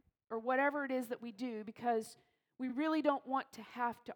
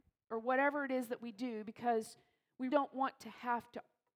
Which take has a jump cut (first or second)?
second